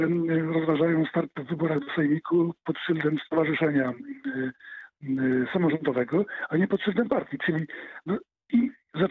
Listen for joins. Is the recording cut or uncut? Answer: uncut